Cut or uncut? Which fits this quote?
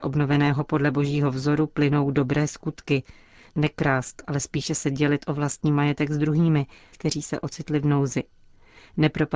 cut